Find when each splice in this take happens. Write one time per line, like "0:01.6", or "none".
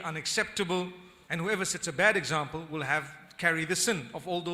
0:01.3